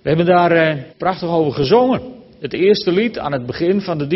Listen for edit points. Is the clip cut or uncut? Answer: cut